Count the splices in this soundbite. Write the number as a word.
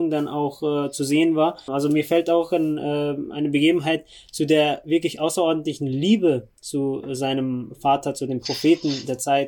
one